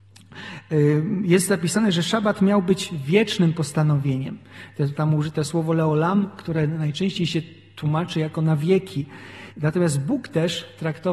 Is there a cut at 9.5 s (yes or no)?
yes